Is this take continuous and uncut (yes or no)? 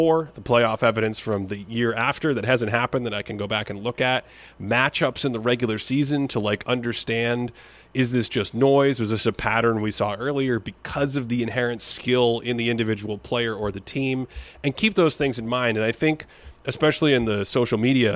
yes